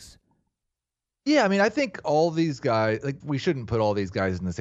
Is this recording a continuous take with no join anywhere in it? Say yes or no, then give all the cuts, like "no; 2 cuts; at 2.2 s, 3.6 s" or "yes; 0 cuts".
no; 1 cut; at 3.2 s